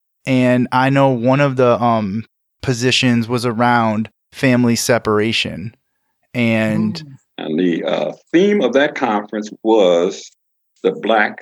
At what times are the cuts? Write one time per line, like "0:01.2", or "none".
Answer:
0:07.3